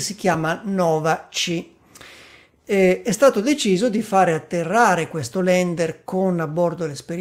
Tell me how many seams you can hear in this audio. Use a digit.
0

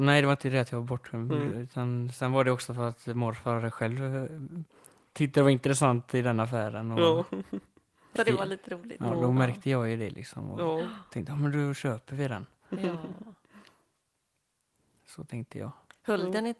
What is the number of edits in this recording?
1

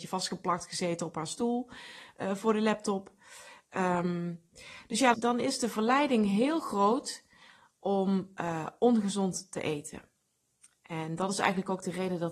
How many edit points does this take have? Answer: 1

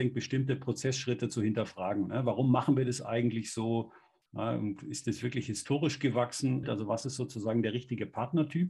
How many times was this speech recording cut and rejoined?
1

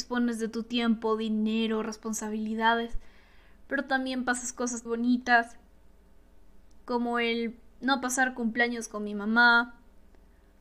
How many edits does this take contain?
1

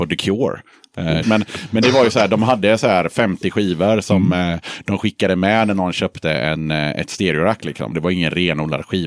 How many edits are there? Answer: 2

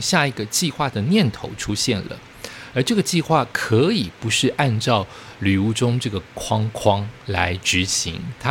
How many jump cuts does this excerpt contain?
1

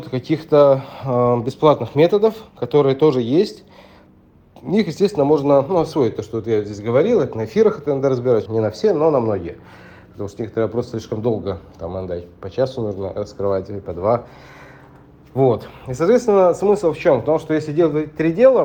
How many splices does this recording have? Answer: 1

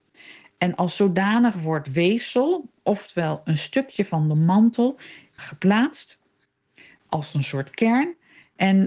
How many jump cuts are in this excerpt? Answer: 1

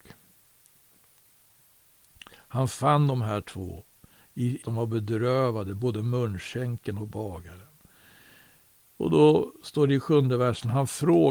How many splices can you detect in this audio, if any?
1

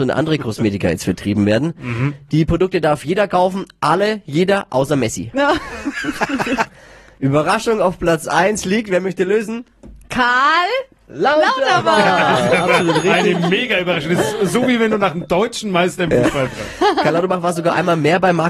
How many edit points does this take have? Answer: 1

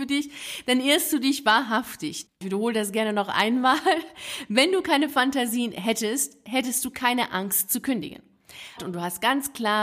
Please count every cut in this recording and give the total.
2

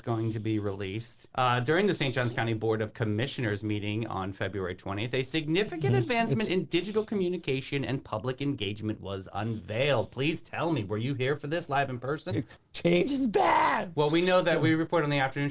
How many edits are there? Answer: 2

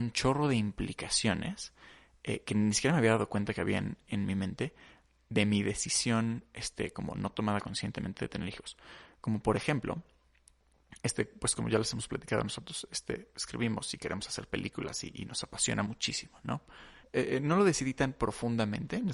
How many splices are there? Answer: 1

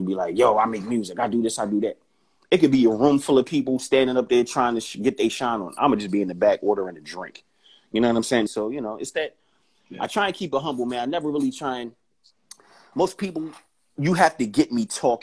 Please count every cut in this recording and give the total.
1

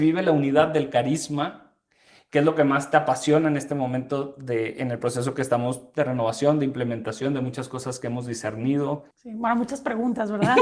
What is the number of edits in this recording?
1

